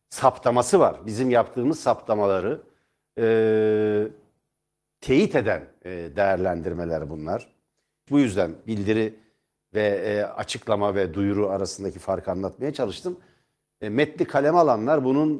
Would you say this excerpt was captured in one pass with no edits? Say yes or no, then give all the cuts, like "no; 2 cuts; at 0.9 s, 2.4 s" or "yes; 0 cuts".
no; 1 cut; at 8.1 s